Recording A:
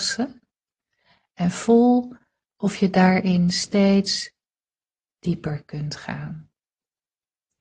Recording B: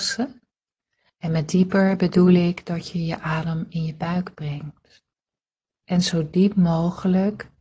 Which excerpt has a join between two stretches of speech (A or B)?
B